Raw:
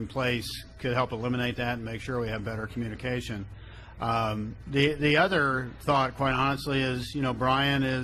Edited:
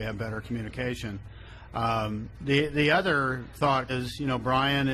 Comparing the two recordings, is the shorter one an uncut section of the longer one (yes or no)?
no